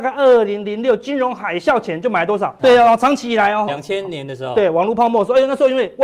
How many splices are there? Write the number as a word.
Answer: two